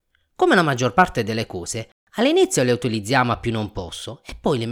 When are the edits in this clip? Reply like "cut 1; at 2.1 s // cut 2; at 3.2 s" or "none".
none